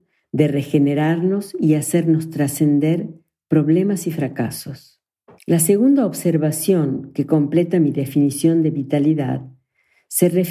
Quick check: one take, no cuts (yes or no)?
no